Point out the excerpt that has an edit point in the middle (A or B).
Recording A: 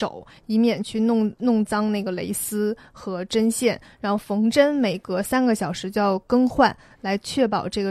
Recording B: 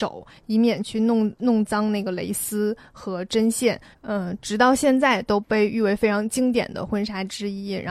B